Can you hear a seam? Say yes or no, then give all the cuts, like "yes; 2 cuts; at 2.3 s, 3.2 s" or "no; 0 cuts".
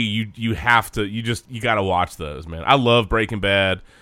no; 0 cuts